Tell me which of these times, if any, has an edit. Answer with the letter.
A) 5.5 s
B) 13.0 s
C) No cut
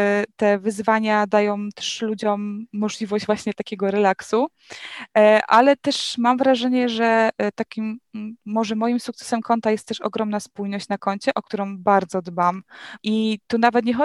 B